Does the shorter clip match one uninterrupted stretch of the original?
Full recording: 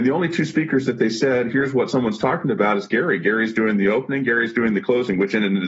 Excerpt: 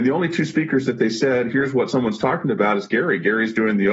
yes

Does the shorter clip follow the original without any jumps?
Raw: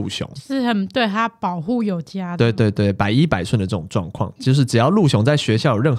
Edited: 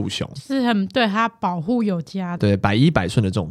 no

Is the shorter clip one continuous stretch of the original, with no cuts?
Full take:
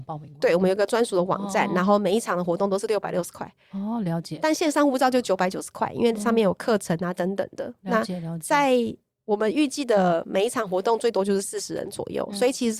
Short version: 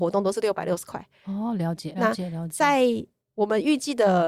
no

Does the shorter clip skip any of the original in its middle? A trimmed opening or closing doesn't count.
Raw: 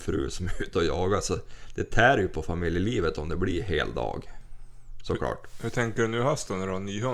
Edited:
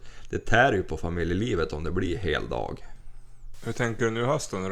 yes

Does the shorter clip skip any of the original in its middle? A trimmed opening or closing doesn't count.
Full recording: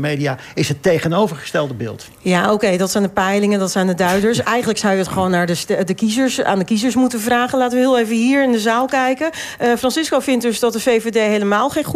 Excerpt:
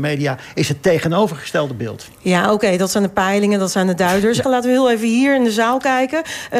yes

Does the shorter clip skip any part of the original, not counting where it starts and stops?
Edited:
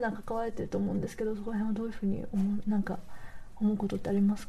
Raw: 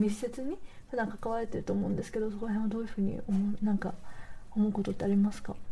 no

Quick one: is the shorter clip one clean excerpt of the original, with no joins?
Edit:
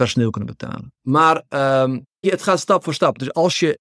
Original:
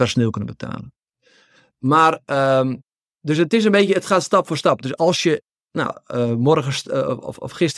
no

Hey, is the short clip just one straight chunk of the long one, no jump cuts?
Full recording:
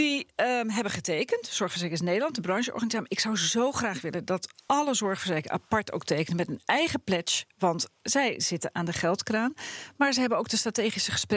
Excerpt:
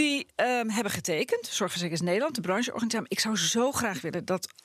yes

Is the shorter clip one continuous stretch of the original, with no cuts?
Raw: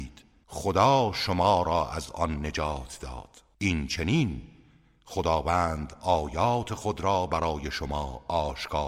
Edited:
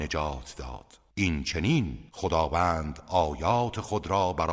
no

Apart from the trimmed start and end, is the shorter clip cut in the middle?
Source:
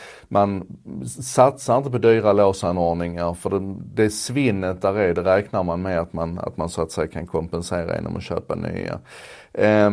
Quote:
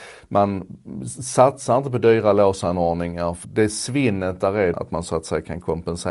yes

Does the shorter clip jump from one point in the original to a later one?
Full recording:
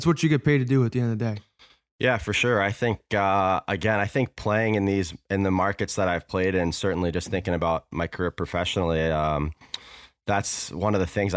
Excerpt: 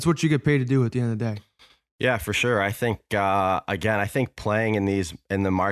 no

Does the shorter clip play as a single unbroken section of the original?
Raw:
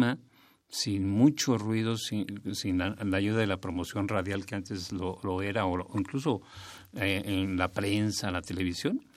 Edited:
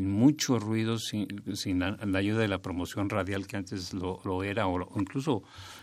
yes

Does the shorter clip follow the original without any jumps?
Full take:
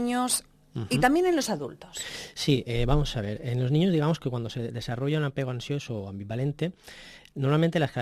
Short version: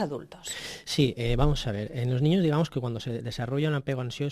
yes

